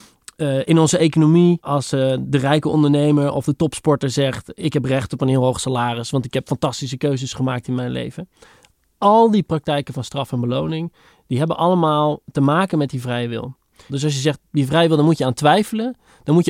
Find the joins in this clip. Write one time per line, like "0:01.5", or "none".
0:01.6
0:13.9